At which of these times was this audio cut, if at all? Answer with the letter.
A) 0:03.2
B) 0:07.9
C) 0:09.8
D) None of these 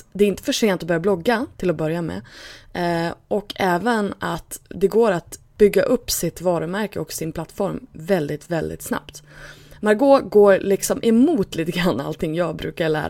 D